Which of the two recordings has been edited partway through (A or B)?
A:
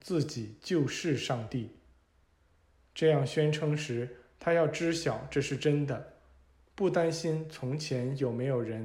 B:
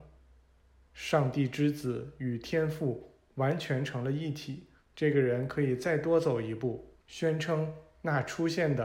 B